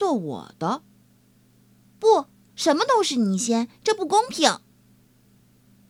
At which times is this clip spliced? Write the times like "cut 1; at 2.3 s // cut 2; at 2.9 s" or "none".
cut 1; at 2.5 s